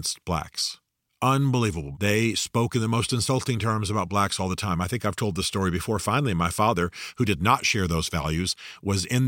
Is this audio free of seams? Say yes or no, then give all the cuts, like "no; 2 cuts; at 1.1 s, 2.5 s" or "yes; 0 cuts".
no; 1 cut; at 1.9 s